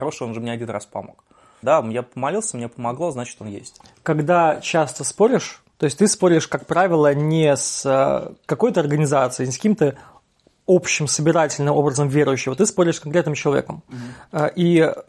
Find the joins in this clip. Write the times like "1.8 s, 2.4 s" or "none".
1.6 s, 5.7 s